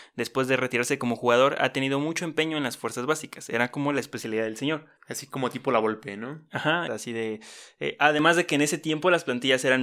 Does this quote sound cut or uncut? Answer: cut